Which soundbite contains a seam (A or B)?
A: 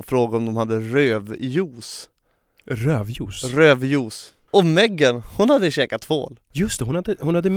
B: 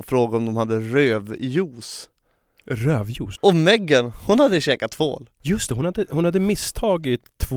B